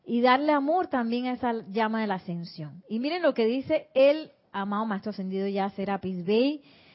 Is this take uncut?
yes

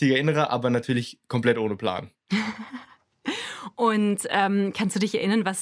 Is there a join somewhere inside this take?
no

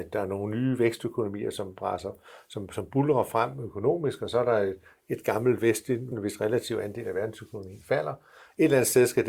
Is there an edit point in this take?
yes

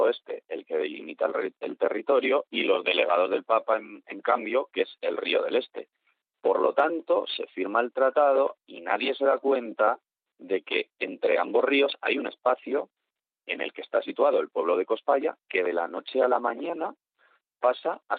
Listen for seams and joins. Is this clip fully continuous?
yes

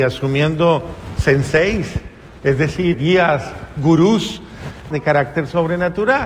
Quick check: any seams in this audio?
yes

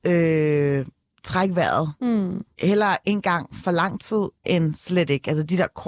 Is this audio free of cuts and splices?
yes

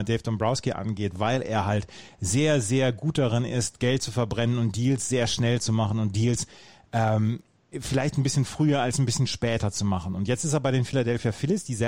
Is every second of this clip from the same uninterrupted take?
yes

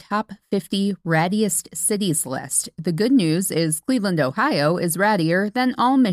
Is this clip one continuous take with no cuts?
yes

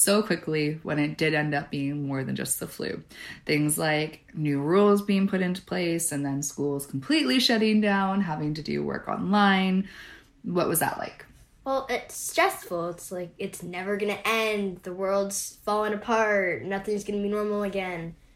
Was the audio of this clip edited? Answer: no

